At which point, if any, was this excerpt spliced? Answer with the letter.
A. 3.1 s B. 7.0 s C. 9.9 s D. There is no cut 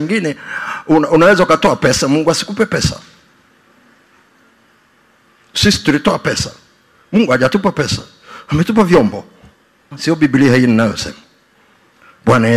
C